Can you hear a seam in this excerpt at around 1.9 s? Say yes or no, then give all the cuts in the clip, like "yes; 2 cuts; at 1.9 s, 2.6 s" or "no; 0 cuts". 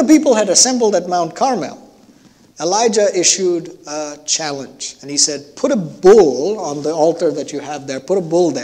no; 0 cuts